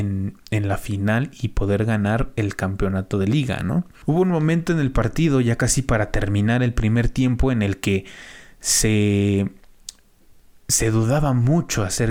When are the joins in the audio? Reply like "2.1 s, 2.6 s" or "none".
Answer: none